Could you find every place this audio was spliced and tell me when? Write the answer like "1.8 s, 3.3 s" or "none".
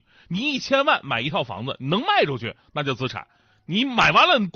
none